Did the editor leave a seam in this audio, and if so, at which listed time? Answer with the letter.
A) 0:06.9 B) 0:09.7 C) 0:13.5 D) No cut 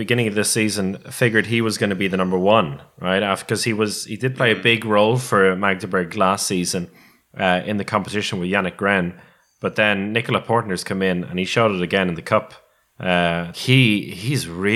C